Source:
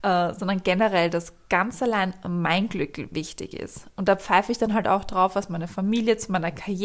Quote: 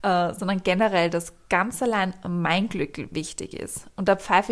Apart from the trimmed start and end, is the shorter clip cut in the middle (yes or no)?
no